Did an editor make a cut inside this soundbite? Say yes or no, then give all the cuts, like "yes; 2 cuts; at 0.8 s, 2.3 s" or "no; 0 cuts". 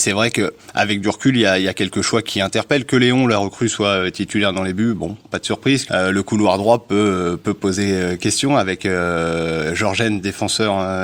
yes; 2 cuts; at 2.2 s, 5.9 s